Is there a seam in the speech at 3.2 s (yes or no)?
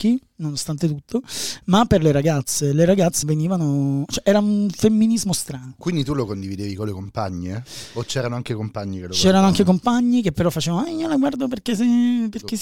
yes